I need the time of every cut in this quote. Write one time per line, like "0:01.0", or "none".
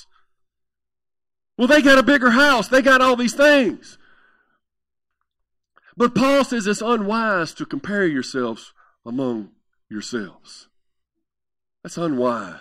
none